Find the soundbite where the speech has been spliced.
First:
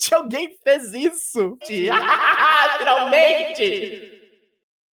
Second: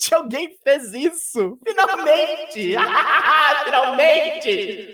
first; 1 cut; at 1.6 s

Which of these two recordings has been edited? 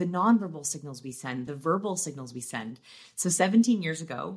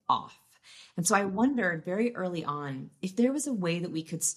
first; 1 cut; at 1.5 s

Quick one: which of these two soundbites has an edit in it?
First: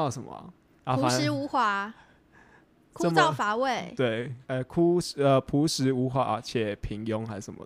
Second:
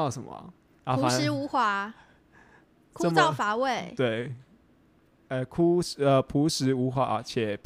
first; 1 cut; at 4.4 s

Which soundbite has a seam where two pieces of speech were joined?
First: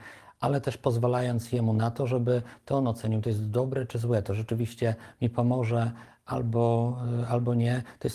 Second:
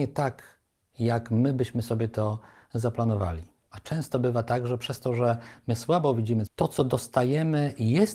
second; 2 cuts; at 3.7 s, 6.5 s

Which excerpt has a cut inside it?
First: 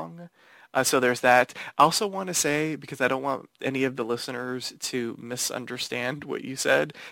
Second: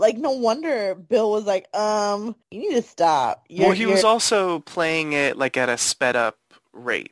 second; 1 cut; at 2.4 s

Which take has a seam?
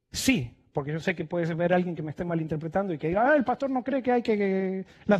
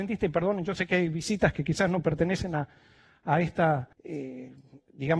second; 1 cut; at 3.9 s

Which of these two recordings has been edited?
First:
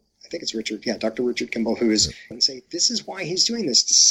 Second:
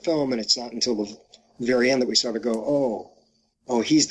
first; 1 cut; at 2.3 s

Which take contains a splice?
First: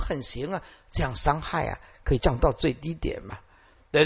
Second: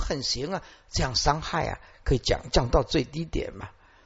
first; 1 cut; at 2.2 s

